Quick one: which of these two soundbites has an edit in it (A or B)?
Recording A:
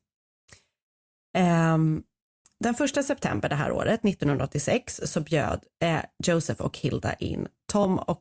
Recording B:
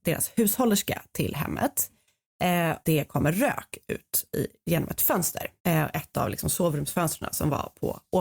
B